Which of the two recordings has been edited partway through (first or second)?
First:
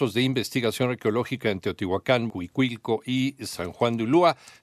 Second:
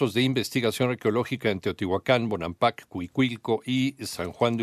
first